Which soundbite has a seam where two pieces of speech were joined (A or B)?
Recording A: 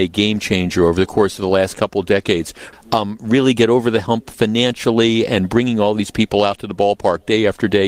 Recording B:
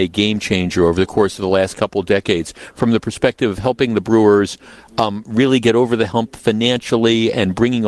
A